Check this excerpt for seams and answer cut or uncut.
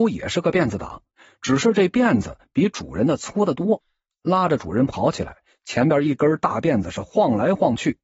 uncut